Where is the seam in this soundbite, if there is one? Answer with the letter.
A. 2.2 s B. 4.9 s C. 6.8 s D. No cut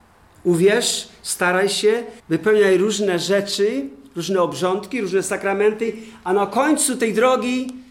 A